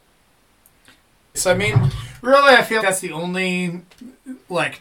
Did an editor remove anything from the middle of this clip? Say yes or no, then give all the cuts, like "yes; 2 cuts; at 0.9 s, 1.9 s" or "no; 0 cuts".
yes; 2 cuts; at 1.3 s, 2.8 s